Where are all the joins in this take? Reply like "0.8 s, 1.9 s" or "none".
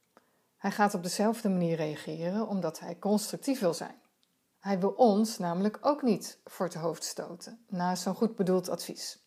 4.5 s